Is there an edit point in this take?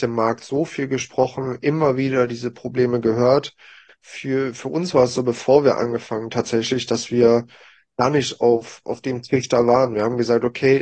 yes; 1 cut; at 3.9 s

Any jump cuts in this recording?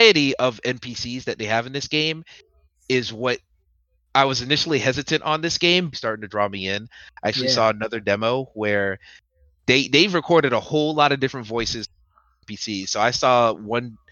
yes; 1 cut; at 5.9 s

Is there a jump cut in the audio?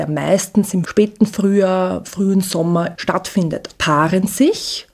yes; 1 cut; at 3.7 s

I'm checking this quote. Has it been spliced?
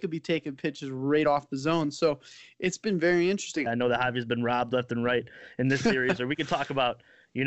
yes; 1 cut; at 3.7 s

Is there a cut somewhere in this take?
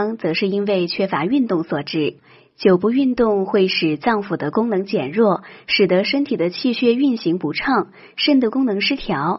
no; 0 cuts

